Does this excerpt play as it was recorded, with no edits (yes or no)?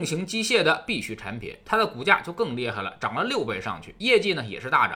yes